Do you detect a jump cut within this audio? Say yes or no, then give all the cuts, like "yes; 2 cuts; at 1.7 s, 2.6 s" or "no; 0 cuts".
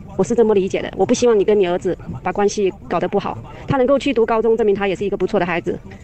no; 0 cuts